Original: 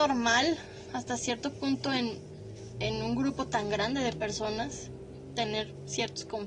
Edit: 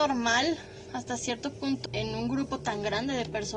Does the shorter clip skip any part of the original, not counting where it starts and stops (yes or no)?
yes